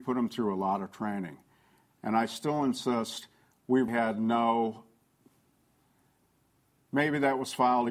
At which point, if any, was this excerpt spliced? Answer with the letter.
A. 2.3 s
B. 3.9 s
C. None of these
B